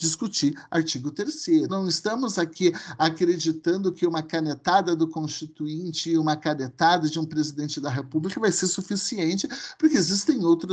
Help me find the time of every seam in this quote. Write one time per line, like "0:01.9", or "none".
0:01.7